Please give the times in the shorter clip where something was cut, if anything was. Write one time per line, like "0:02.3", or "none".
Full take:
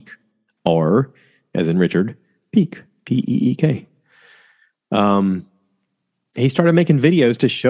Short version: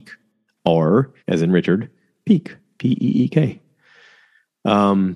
0:01.2